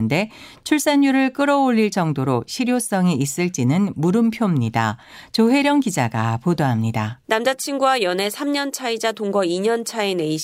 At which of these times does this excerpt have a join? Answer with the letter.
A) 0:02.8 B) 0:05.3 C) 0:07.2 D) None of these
C